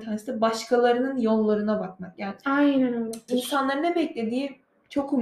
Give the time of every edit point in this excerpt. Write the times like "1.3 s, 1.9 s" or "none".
3.3 s